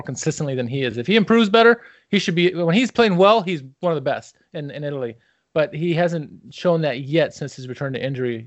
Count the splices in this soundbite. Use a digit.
0